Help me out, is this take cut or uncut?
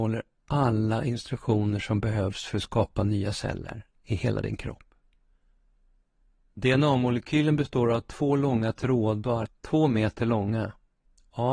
cut